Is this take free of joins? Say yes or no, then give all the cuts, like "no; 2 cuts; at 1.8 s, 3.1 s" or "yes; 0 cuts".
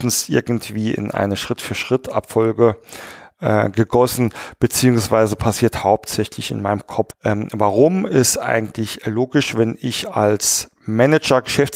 no; 1 cut; at 7.1 s